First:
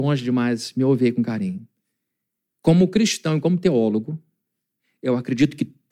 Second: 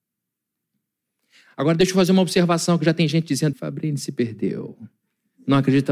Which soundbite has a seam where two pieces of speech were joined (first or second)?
second